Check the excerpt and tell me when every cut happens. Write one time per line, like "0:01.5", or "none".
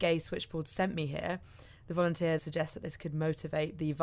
0:02.4